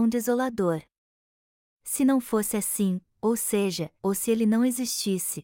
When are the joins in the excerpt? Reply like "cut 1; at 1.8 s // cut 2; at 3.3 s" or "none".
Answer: cut 1; at 4.0 s